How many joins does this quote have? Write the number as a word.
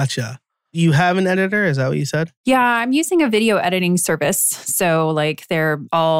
zero